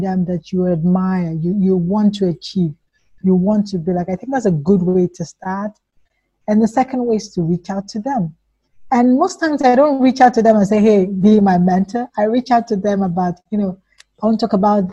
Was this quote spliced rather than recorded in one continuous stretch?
no; 0 cuts

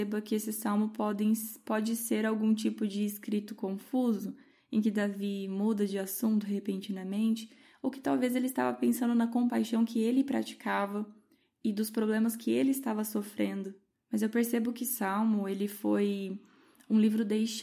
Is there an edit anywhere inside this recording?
no; 0 cuts

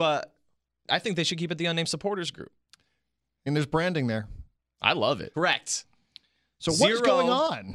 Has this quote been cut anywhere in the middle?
yes; 2 cuts; at 3.5 s, 5.3 s

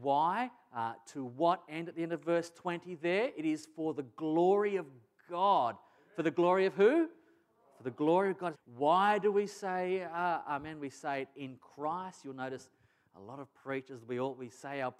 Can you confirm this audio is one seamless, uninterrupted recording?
no; 1 cut; at 8.5 s

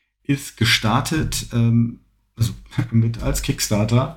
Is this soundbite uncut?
no; 1 cut; at 3.2 s

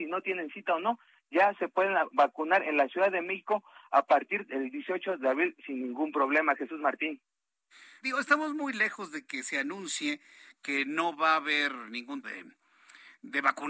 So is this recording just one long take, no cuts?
no; 2 cuts; at 8.0 s, 12.2 s

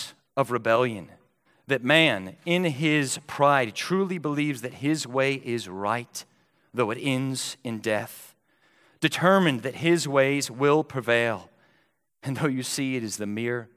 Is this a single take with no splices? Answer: yes; 0 cuts

